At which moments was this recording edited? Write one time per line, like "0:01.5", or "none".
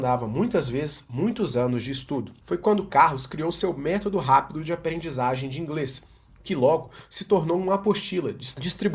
none